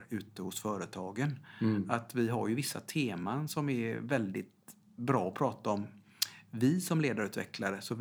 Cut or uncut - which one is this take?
uncut